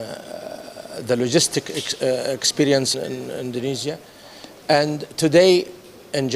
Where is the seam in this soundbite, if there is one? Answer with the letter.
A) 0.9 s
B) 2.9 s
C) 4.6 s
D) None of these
B